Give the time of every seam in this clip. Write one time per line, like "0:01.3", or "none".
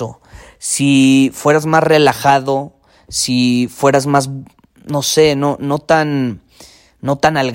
none